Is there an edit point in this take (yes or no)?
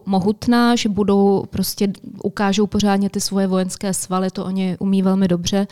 no